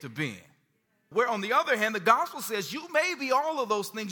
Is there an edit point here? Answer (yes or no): yes